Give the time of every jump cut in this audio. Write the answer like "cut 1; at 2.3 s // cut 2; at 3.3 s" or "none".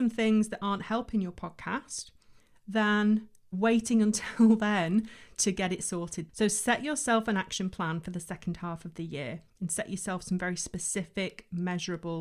cut 1; at 6.3 s